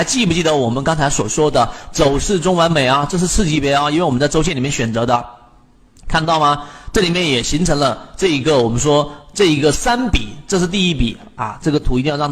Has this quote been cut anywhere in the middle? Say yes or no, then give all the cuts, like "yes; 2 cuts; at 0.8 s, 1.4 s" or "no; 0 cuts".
no; 0 cuts